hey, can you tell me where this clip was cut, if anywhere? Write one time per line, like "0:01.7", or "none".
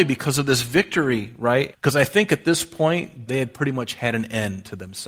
0:01.7
0:03.3